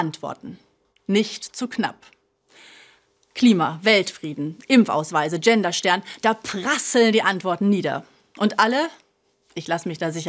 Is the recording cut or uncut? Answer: uncut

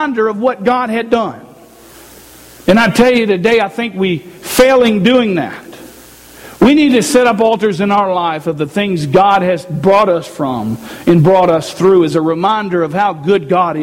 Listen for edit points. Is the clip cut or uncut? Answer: uncut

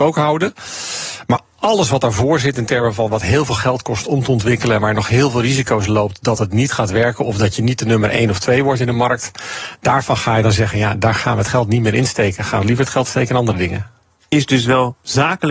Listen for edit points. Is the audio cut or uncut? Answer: uncut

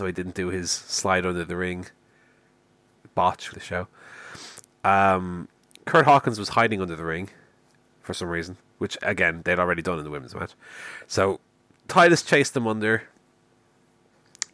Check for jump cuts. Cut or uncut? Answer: cut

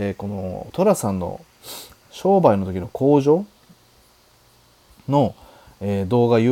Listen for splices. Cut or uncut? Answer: uncut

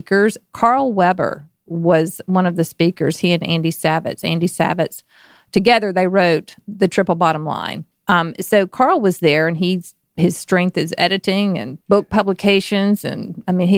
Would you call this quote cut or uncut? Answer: uncut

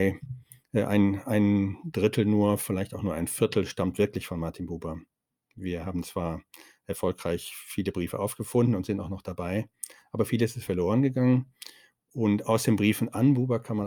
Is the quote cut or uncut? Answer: uncut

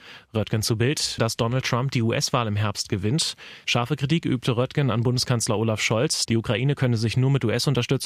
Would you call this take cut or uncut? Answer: cut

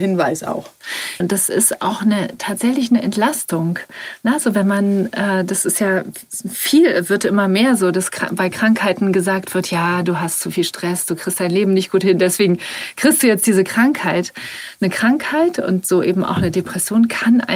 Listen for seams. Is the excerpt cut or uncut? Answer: cut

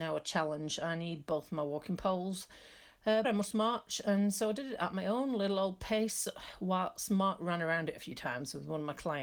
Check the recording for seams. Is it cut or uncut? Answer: cut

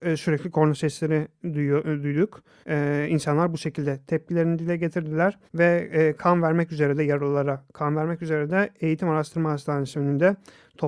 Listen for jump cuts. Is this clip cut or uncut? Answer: cut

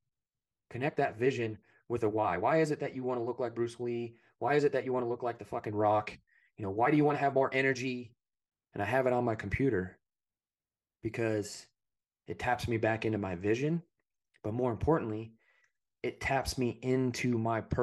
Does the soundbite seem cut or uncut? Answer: cut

